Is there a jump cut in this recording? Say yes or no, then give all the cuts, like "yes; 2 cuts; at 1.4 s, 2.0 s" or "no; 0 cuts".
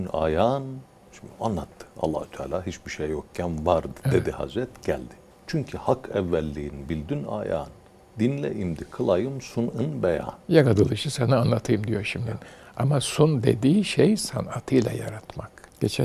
yes; 1 cut; at 10.4 s